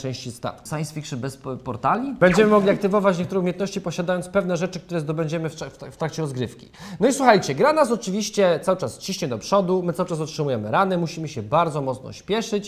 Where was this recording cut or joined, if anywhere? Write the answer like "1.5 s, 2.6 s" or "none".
2.2 s